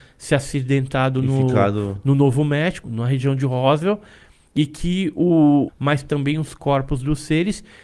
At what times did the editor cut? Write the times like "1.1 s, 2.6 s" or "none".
2.8 s, 5.7 s